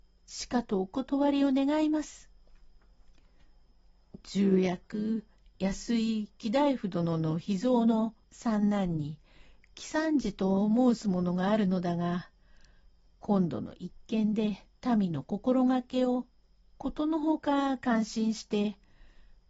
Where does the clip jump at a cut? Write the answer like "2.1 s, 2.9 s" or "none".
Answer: 4.2 s, 8.2 s, 14.7 s

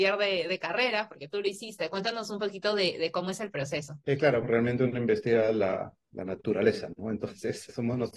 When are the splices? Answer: 4.4 s

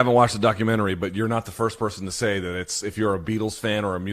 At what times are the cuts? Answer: none

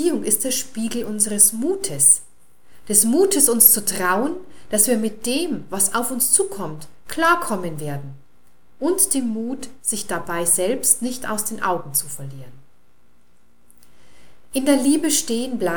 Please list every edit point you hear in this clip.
none

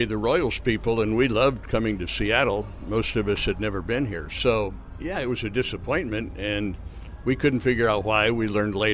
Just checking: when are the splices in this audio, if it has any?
none

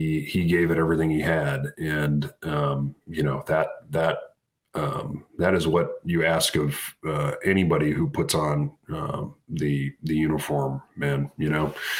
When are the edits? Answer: 3.0 s

